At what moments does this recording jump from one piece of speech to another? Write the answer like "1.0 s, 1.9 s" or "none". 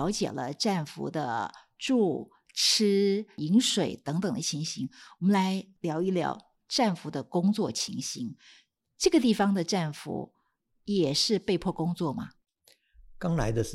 none